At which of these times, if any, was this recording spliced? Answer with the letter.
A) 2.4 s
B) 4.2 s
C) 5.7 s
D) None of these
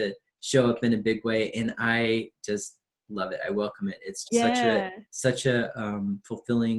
B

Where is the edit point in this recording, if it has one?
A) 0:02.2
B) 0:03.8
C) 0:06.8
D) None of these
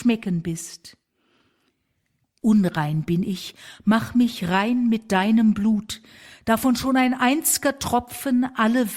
A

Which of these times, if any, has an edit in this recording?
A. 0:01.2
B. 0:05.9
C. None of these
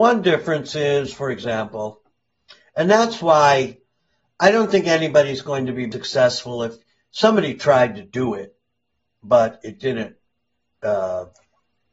B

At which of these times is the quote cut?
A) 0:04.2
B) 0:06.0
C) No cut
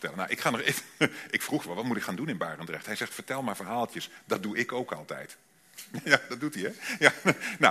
B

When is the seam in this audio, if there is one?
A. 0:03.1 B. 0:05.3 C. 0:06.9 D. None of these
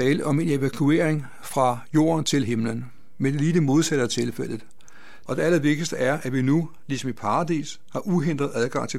B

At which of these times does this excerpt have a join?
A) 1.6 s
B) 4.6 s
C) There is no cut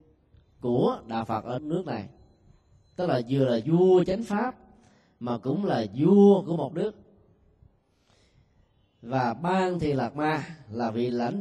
A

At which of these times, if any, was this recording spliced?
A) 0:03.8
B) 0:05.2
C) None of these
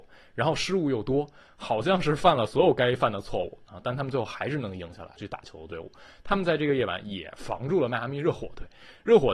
B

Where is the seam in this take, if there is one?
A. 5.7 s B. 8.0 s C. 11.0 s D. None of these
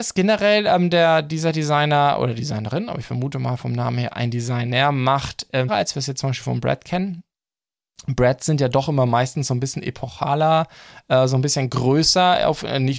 A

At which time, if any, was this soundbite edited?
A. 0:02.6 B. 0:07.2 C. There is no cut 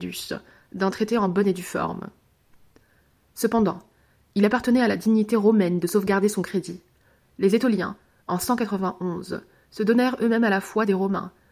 B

